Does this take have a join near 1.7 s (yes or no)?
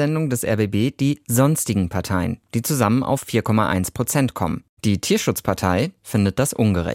no